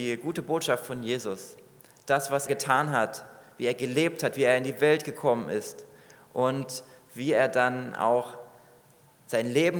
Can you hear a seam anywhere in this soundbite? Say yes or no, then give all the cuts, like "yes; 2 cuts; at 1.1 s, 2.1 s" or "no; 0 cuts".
yes; 1 cut; at 2.5 s